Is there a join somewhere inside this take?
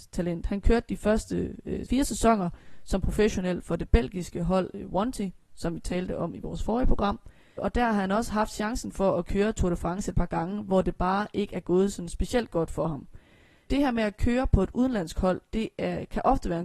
no; 0 cuts

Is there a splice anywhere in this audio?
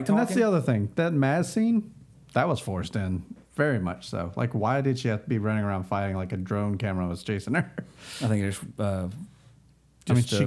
no; 0 cuts

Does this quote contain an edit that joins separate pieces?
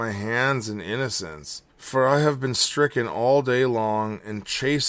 yes; 1 cut; at 1.7 s

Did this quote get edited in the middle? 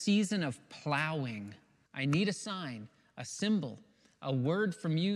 yes; 1 cut; at 1.9 s

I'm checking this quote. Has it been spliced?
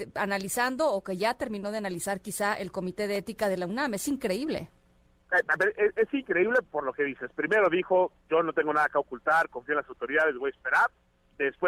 no; 0 cuts

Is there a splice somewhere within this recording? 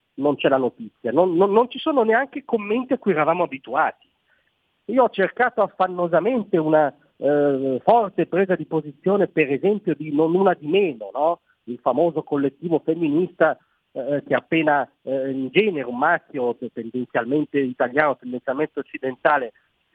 no; 0 cuts

